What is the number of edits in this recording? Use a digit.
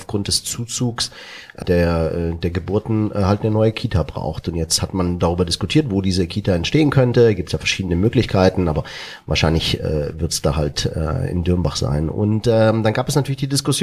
1